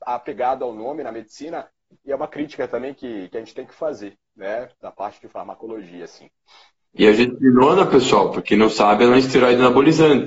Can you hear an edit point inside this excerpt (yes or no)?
yes